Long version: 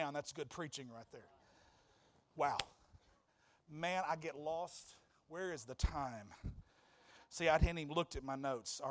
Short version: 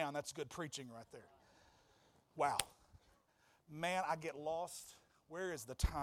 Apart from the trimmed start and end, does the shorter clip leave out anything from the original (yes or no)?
no